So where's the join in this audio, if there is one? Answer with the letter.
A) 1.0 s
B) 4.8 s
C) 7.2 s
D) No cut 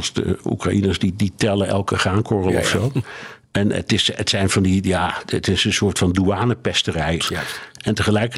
C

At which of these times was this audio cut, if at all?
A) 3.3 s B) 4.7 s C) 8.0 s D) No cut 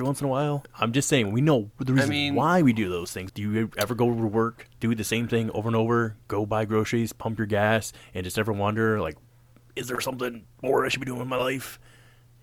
A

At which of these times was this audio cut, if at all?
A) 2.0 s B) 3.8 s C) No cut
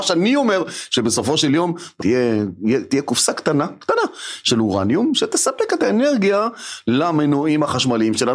A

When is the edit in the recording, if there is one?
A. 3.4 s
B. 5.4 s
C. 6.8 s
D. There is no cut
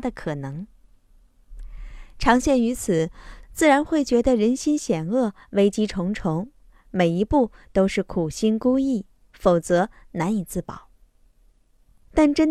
A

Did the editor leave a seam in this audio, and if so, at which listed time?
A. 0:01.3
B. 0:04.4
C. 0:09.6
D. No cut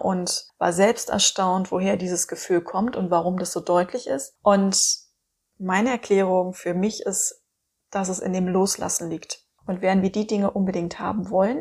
C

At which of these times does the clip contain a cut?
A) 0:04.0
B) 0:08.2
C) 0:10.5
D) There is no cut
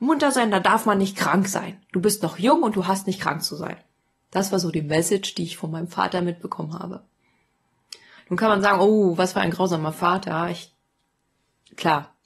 B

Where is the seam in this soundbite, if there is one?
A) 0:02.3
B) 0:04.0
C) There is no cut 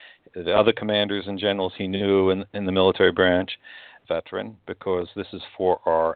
B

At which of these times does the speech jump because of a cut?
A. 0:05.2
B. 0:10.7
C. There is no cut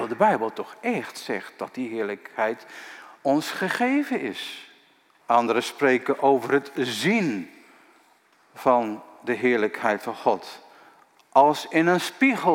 A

